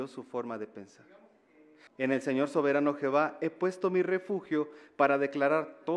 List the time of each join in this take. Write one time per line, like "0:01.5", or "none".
0:01.9